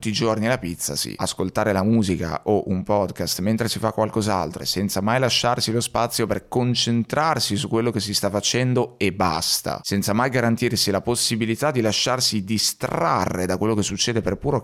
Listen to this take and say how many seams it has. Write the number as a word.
two